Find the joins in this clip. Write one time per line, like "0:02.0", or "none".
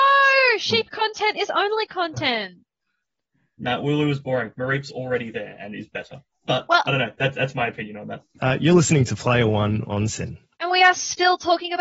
0:08.4